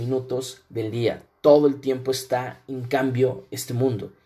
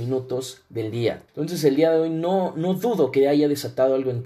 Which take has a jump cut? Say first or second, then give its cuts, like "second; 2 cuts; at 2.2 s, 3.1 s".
second; 1 cut; at 1.3 s